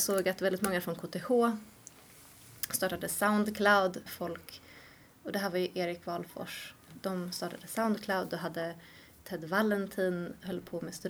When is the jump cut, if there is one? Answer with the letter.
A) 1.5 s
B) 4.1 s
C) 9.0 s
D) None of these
B